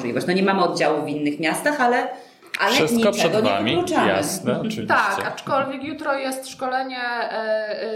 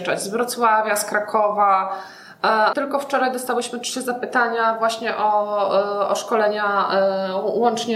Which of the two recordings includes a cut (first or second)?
second